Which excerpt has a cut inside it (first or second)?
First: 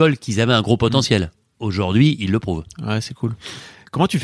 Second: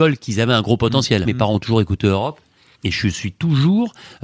second